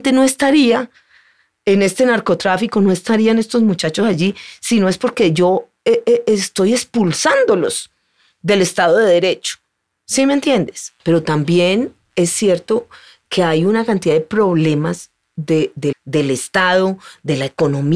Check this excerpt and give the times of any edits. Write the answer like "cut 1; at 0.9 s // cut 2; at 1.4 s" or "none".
cut 1; at 11.0 s // cut 2; at 15.9 s

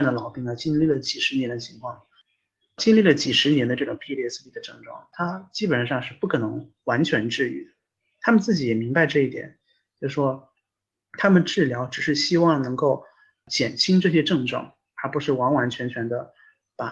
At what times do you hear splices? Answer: none

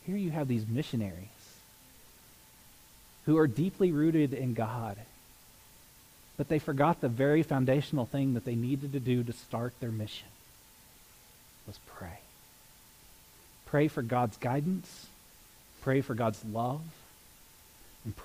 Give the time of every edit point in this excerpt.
none

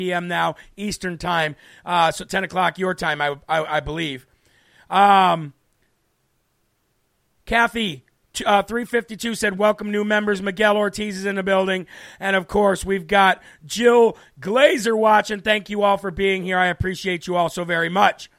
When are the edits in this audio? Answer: cut 1; at 9.6 s

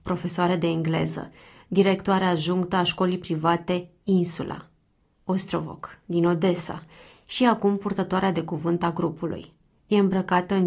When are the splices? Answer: none

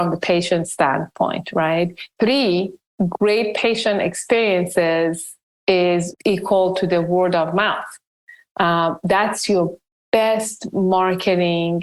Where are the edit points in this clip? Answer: cut 1; at 2.2 s

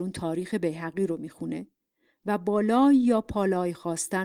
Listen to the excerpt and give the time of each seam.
none

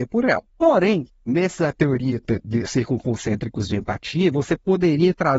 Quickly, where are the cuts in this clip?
cut 1; at 2.7 s

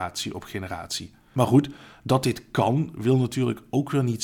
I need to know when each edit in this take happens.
none

